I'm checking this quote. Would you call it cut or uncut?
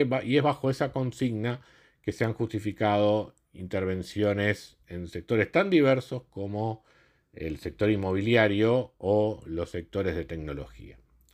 uncut